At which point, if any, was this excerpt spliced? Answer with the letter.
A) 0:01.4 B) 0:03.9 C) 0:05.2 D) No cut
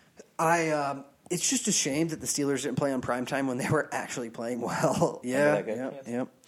C